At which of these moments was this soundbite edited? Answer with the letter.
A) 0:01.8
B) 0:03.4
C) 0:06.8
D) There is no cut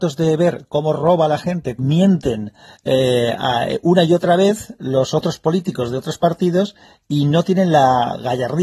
A